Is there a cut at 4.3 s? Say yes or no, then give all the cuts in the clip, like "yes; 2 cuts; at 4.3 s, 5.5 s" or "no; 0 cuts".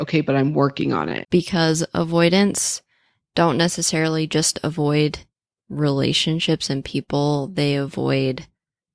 no; 1 cut; at 1.2 s